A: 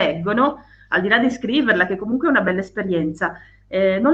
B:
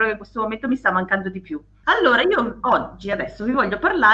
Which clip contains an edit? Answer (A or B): B